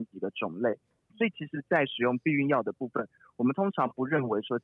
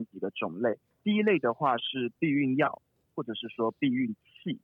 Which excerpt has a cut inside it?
first; 1 cut; at 1.0 s

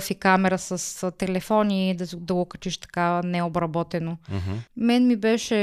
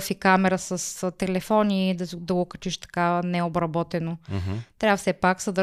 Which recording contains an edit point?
first; 1 cut; at 4.7 s

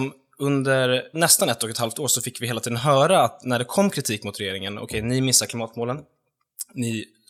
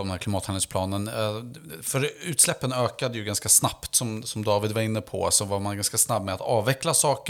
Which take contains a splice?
first; 1 cut; at 1.1 s

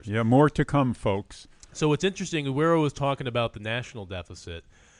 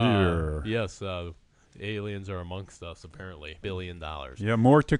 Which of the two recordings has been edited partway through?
second; 1 cut; at 3.6 s

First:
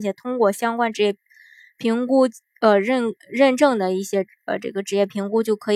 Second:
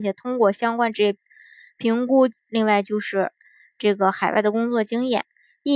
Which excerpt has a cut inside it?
second; 1 cut; at 2.5 s

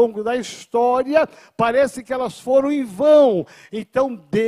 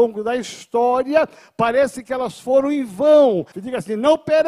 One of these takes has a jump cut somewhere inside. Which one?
second; 1 cut; at 3.5 s

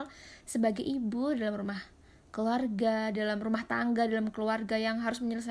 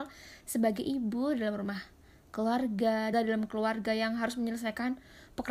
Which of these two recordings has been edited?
second; 1 cut; at 3.1 s

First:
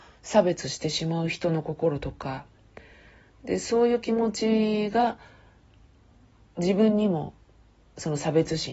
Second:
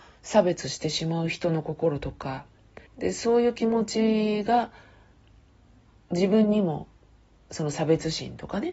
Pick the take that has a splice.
second; 1 cut; at 2.9 s

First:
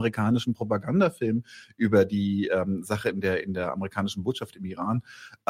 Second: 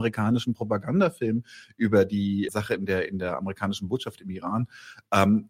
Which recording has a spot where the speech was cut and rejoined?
second; 1 cut; at 2.5 s

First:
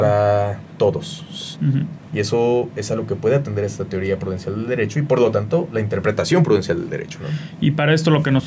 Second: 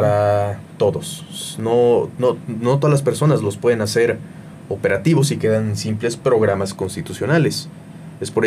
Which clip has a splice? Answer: first; 1 cut; at 1.6 s

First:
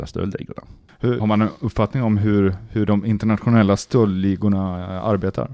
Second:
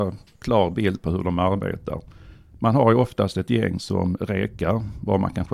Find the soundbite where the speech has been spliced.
first; 1 cut; at 1.2 s

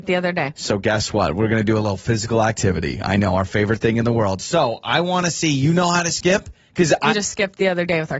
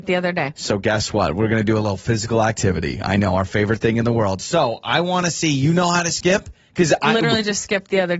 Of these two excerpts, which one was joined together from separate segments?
first; 1 cut; at 7.1 s

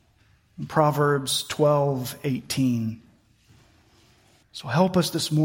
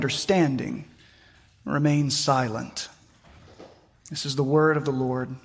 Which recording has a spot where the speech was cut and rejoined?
first; 1 cut; at 4.4 s

